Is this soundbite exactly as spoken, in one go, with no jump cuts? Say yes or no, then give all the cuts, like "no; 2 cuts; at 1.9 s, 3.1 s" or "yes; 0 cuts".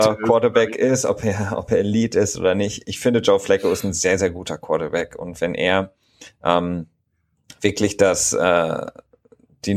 yes; 0 cuts